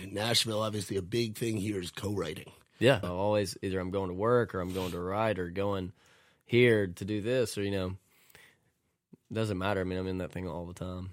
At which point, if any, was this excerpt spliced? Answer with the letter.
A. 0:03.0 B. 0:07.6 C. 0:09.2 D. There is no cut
A